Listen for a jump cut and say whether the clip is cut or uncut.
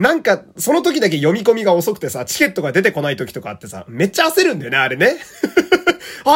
uncut